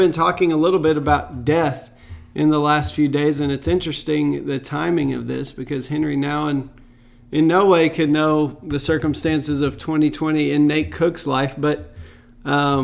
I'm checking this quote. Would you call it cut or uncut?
uncut